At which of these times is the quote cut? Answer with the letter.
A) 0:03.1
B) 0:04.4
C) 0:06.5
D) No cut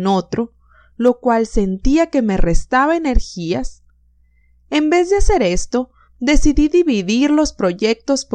D